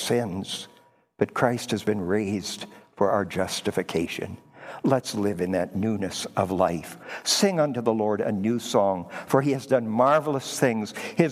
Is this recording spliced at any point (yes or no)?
no